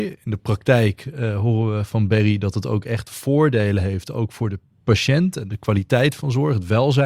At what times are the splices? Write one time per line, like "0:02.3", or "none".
none